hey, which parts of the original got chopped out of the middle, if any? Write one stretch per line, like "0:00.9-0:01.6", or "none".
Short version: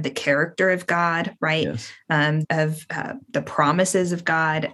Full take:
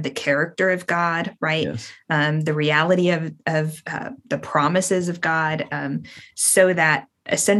0:02.4-0:03.4

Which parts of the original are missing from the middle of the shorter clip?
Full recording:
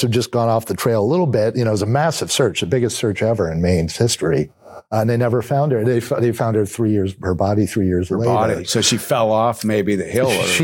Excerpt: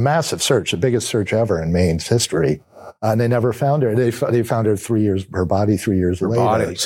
none

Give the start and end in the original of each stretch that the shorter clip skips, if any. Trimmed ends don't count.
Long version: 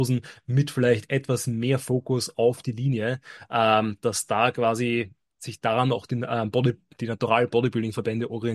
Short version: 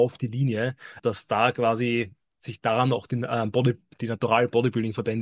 0:03.4-0:04.0

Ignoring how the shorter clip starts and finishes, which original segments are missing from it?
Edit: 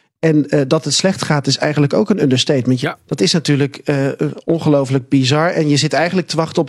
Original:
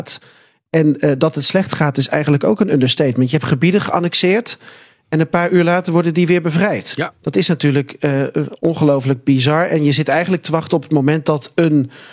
0:03.3-0:07.0

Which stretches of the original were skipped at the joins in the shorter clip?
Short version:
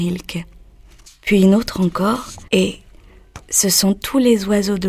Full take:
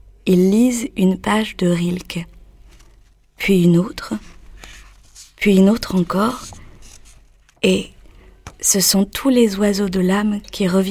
0:02.9-0:05.2
0:06.6-0:07.6

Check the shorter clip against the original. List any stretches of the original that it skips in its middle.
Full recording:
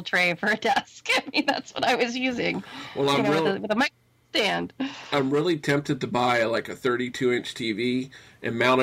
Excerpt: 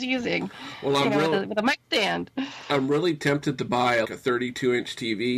0:04.0-0:04.3
0:06.5-0:06.6

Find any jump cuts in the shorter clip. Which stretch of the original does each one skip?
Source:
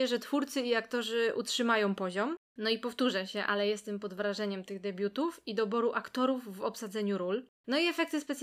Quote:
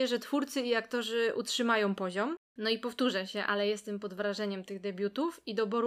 none

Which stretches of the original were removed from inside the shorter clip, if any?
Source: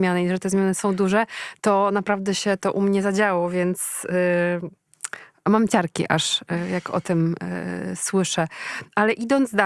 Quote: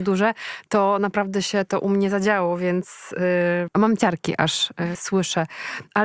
0:04.6-0:05.4
0:06.7-0:08.0

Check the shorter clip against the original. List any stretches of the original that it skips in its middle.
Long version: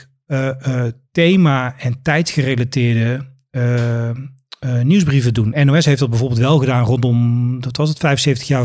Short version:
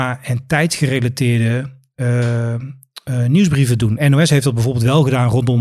none

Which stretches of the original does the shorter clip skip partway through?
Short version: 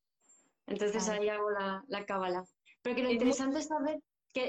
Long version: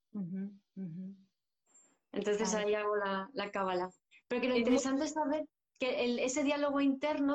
none

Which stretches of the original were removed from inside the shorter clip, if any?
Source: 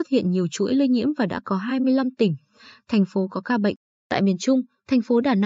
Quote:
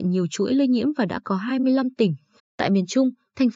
0:02.6-0:03.9

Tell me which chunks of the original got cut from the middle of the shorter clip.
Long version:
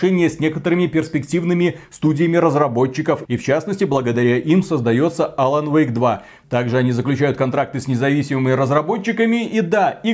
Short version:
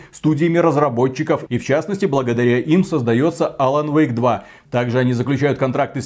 none

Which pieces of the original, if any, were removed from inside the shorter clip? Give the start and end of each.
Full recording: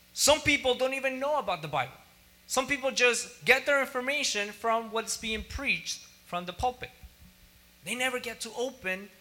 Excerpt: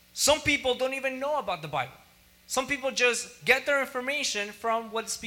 none

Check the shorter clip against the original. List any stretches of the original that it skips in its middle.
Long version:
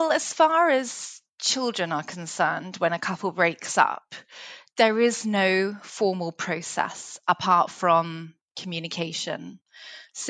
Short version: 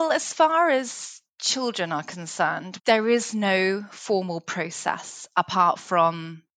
0:02.8-0:04.7

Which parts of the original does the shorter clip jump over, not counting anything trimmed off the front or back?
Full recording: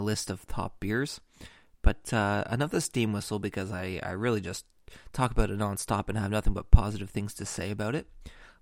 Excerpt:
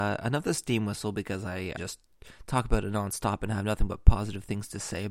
0:04.0-0:04.4

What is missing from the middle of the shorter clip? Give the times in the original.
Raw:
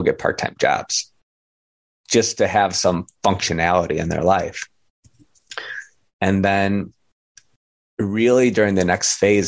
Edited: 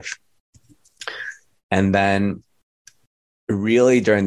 none

